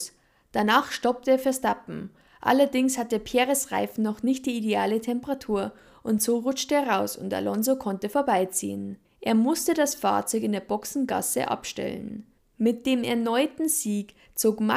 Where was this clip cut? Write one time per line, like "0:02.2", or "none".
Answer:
0:09.0
0:12.4